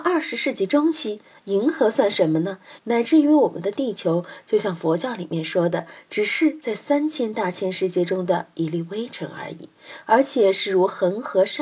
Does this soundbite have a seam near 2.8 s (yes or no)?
yes